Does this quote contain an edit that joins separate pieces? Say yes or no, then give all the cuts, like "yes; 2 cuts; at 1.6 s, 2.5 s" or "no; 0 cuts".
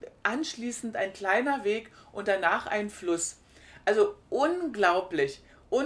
no; 0 cuts